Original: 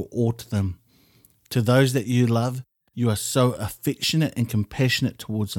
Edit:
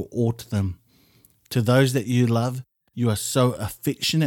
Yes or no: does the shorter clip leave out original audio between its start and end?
no